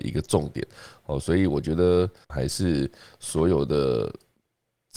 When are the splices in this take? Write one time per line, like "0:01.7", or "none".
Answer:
0:02.3